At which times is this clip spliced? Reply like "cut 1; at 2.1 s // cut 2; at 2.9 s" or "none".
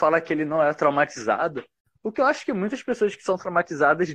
none